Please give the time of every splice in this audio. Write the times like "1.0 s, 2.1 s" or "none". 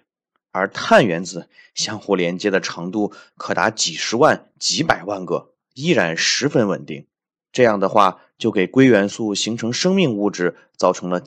none